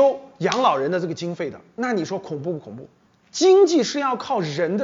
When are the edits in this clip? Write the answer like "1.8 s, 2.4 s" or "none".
3.2 s

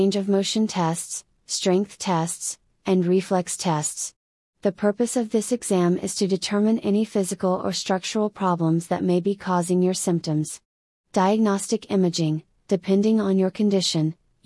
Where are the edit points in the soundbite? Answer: none

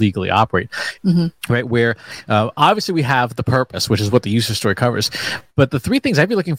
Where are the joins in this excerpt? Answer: 1.0 s

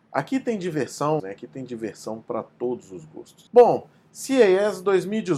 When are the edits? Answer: 1.2 s, 3.5 s

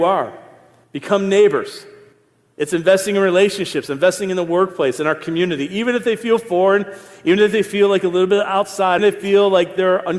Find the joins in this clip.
9.0 s

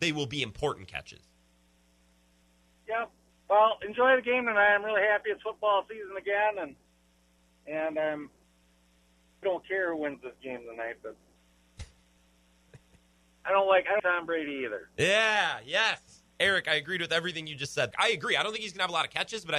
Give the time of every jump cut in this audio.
9.4 s, 14.0 s, 17.9 s

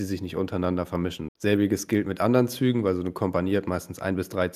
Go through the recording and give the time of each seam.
1.3 s

